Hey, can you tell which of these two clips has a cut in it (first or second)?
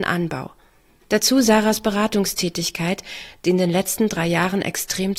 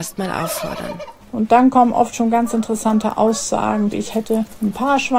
second